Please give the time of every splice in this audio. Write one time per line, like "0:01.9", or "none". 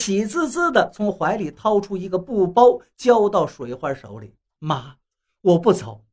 0:04.6